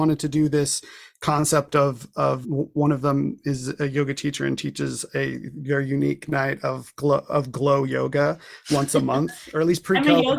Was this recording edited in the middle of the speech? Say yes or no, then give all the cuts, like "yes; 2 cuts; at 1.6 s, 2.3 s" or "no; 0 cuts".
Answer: yes; 1 cut; at 2.4 s